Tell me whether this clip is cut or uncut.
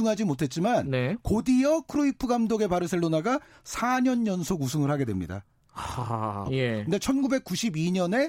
cut